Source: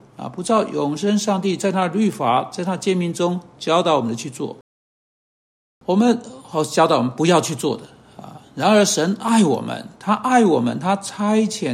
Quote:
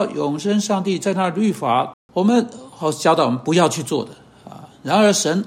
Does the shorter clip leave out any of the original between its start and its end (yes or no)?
yes